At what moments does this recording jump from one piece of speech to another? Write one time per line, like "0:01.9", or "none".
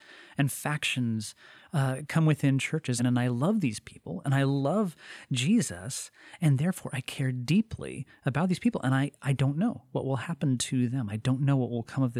0:03.0